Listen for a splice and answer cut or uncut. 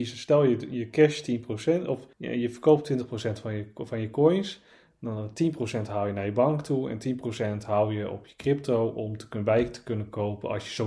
cut